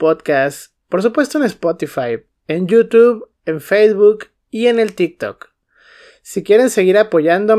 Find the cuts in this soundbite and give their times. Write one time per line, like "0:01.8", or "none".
none